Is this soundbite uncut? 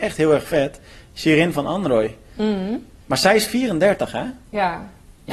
no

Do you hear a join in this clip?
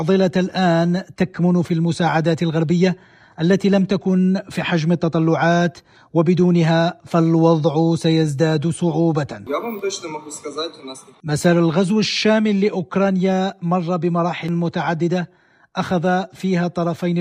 yes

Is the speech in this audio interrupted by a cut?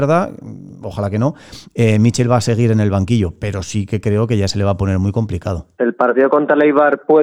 yes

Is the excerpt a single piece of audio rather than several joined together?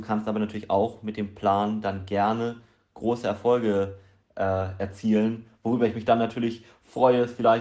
yes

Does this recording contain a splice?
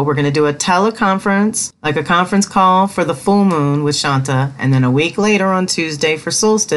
no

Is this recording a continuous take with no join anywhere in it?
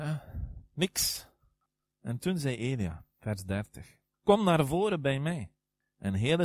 no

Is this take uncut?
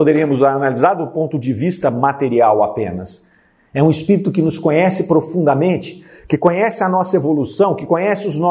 yes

